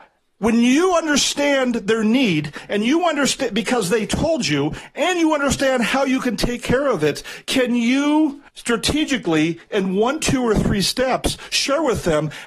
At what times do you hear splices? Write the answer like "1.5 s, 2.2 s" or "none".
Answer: 8.5 s